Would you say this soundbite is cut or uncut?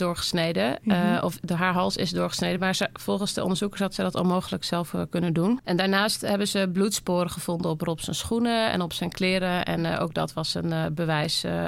uncut